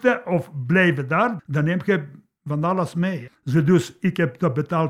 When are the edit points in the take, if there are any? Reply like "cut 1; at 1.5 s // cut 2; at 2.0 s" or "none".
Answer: cut 1; at 1.4 s // cut 2; at 3.3 s